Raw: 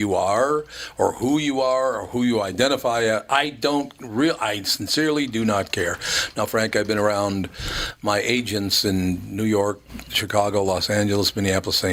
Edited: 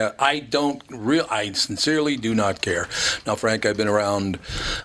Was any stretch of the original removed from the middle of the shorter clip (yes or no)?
no